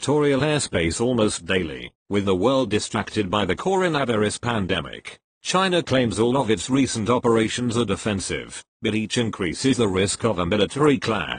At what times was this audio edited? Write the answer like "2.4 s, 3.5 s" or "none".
5.3 s